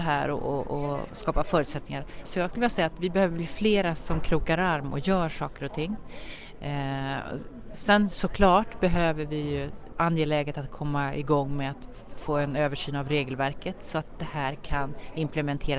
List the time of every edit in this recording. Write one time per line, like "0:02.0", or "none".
0:02.2